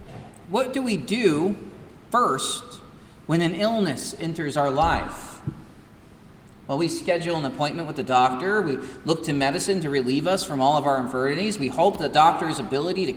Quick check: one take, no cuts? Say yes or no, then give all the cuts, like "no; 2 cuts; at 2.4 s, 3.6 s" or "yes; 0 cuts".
yes; 0 cuts